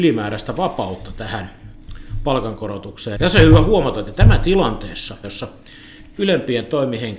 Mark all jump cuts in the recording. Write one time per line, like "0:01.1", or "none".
0:03.2
0:05.2